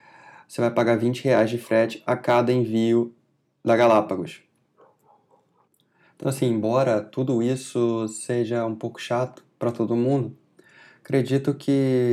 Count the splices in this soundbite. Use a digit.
0